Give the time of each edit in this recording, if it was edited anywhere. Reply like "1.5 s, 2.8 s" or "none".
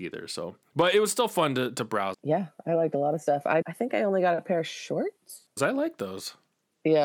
2.1 s, 3.6 s, 5.6 s